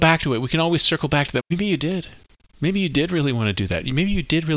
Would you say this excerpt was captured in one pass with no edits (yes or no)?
no